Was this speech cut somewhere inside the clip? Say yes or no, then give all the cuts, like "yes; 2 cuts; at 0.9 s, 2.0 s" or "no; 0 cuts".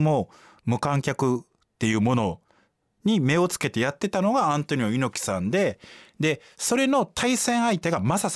no; 0 cuts